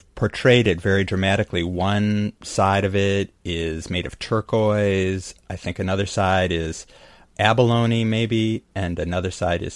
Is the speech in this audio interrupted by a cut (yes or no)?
no